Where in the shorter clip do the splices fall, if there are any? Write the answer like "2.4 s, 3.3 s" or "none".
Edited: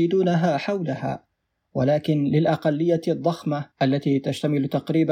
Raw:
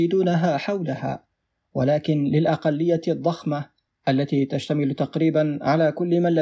3.7 s